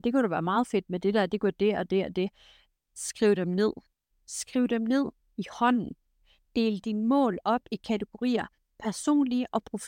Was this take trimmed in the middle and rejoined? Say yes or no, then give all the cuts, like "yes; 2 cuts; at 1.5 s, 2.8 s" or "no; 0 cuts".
yes; 1 cut; at 4.1 s